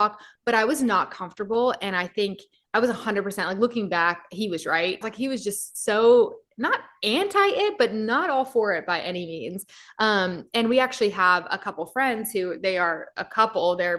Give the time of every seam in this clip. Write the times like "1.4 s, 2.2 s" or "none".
5.0 s